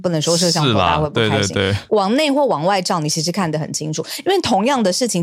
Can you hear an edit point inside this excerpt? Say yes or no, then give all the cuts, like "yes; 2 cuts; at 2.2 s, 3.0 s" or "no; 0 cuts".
no; 0 cuts